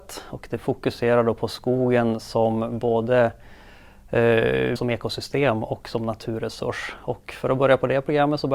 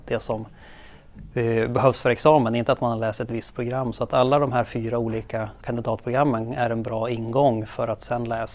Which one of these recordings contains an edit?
first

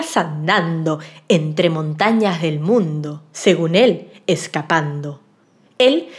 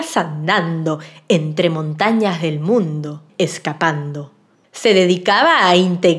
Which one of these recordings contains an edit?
second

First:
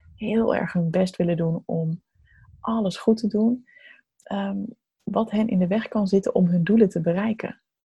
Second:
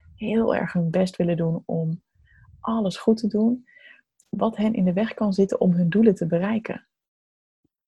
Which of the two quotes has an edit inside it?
second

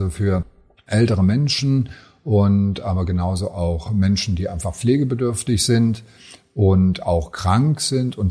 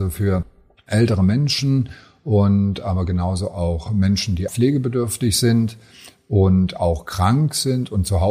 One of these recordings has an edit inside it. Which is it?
second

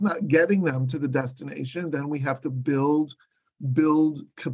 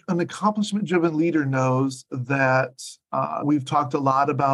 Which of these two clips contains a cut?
second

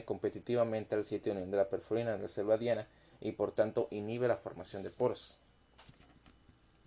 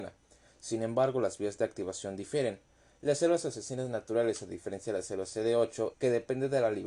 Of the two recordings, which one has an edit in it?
second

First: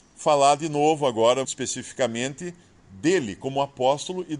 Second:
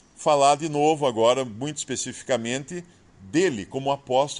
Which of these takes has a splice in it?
first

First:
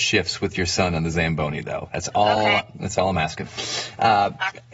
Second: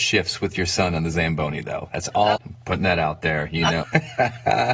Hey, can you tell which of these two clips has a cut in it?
second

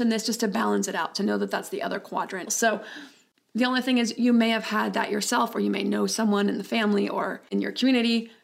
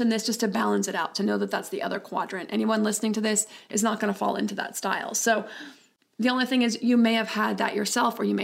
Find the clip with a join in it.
first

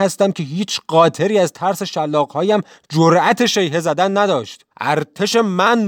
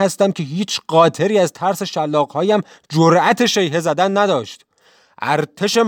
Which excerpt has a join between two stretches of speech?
first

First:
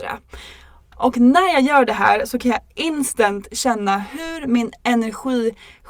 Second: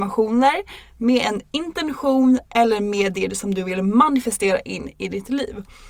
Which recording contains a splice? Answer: first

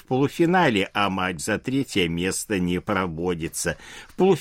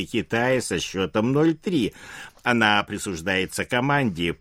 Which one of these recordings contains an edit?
second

